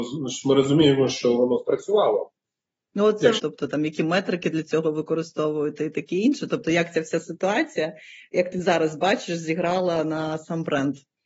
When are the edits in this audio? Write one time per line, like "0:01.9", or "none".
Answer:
0:03.4